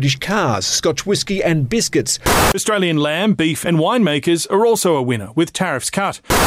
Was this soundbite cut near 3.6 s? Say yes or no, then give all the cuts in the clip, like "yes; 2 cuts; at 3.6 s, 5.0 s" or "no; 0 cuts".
yes; 1 cut; at 3.6 s